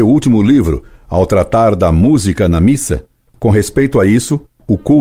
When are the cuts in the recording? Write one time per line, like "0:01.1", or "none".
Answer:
0:03.3